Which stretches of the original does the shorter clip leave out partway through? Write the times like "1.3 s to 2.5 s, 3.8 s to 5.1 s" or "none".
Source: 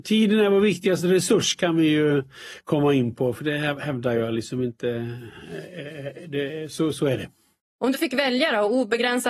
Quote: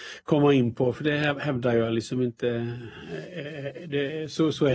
none